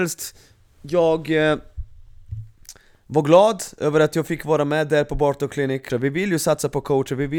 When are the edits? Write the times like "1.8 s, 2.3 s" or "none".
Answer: 5.9 s